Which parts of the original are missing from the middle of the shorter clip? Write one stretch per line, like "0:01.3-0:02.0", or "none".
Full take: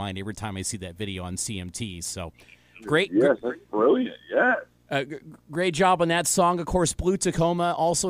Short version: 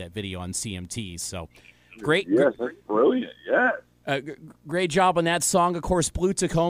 none